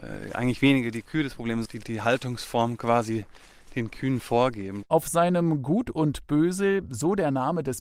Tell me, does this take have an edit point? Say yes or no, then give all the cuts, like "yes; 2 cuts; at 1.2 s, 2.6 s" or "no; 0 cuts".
yes; 1 cut; at 1.6 s